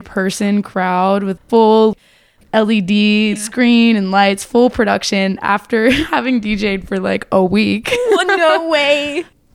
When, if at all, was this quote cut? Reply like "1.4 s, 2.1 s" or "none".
none